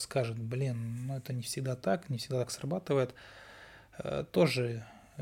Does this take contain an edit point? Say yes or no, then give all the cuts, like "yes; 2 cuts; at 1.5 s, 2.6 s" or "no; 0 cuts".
no; 0 cuts